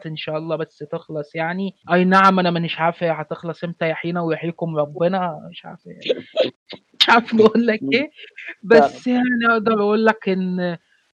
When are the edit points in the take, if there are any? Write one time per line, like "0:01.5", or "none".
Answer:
0:01.8